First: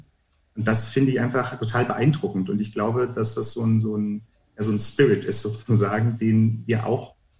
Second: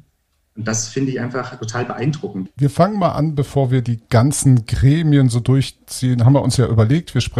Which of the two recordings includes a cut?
second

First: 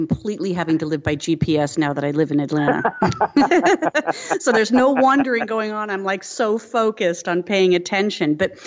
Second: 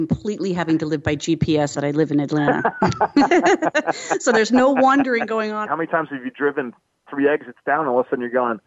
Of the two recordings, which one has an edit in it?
second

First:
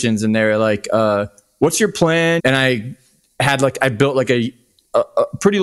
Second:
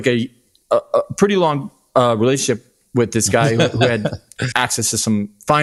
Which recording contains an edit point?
first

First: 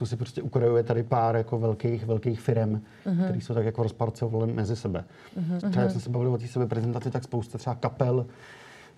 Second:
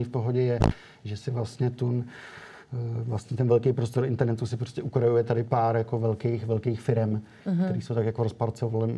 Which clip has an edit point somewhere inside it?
first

